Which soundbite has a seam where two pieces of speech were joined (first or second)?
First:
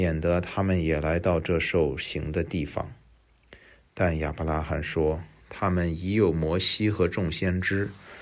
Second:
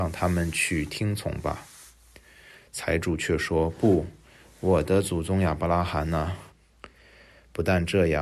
second